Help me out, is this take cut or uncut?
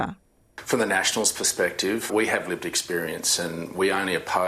cut